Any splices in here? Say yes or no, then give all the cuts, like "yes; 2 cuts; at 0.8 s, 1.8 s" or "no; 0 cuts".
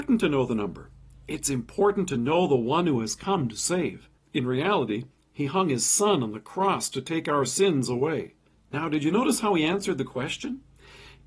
yes; 2 cuts; at 4.2 s, 8.5 s